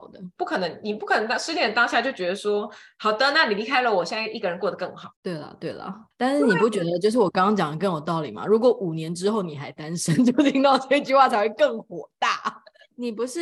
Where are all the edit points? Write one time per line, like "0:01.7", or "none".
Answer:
0:06.1